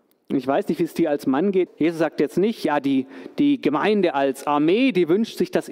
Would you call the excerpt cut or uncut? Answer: cut